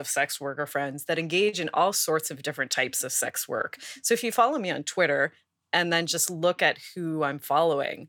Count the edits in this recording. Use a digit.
0